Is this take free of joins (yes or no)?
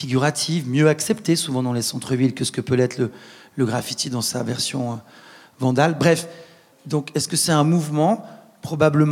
no